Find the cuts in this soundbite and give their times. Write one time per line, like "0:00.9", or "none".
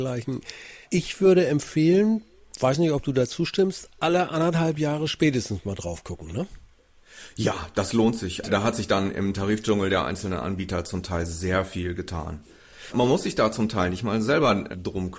0:08.4